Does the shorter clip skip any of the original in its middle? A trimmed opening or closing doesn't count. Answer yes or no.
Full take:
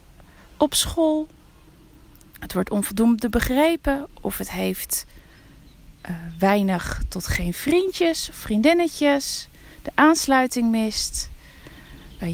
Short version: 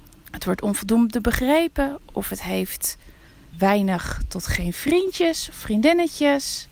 yes